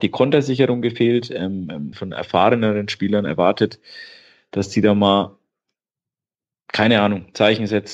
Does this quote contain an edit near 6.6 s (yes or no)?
no